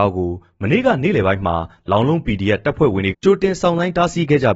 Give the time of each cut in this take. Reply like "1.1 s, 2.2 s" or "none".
3.1 s